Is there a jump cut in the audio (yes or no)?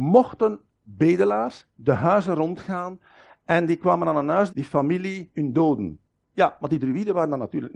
yes